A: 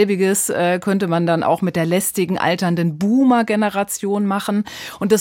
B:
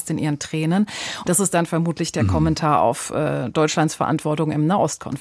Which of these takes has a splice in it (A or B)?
B